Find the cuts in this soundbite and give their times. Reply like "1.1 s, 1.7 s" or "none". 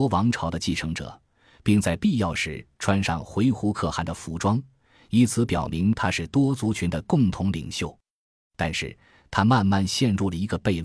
none